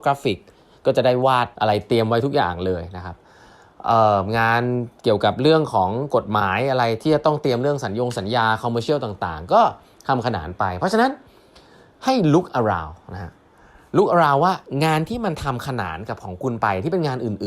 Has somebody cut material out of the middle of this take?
yes; 1 cut; at 1.5 s

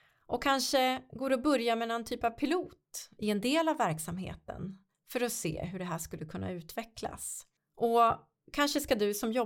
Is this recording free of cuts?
no; 1 cut; at 7.6 s

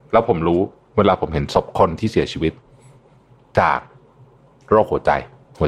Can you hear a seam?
no; 0 cuts

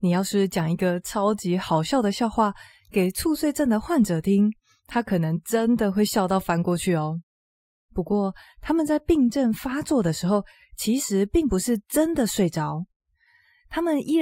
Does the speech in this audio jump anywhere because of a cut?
no; 0 cuts

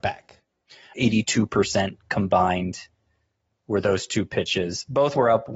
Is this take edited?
yes; 1 cut; at 0.9 s

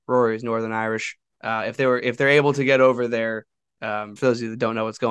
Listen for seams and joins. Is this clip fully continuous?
no; 1 cut; at 4.2 s

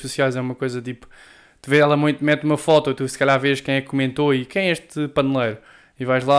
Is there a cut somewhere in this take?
no; 0 cuts

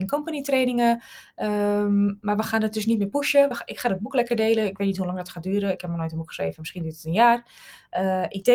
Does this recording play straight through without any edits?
yes; 0 cuts

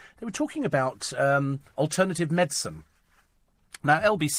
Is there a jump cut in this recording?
no; 0 cuts

